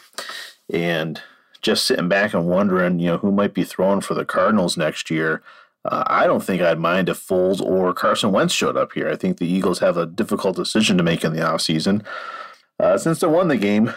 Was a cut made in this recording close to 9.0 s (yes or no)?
no